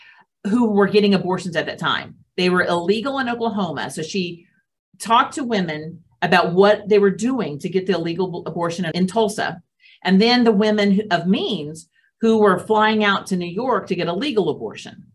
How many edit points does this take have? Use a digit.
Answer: 1